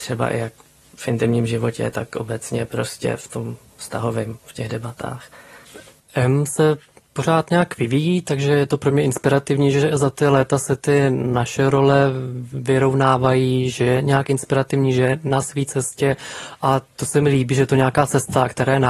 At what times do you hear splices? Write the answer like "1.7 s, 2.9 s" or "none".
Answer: none